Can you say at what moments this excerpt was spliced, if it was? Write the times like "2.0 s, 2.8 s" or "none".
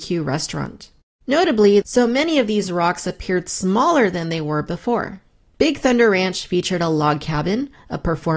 1.8 s, 5.5 s